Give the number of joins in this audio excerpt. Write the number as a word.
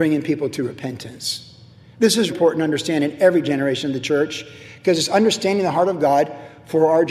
one